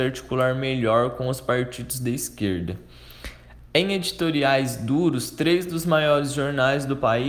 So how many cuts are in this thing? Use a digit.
0